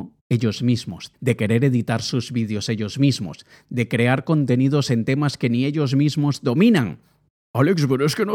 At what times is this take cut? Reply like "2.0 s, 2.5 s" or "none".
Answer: 1.1 s